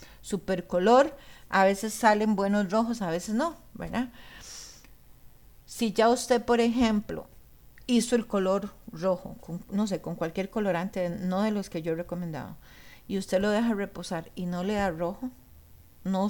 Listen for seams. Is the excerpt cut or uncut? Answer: uncut